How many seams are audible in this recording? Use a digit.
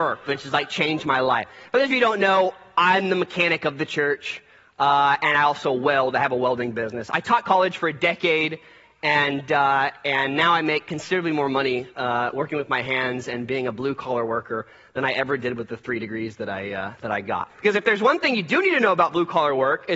1